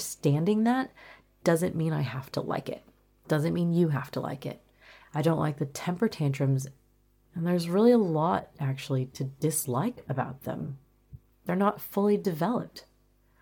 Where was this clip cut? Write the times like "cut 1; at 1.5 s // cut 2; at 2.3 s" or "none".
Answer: cut 1; at 5.0 s // cut 2; at 7.3 s // cut 3; at 11.3 s